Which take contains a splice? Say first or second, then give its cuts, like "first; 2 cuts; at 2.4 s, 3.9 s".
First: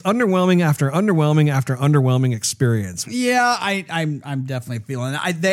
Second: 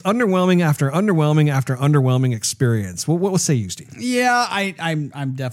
first; 1 cut; at 3.0 s